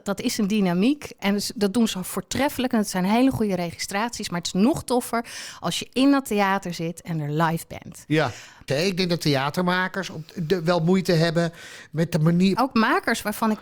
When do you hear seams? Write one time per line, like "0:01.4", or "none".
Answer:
0:01.2
0:08.7
0:12.6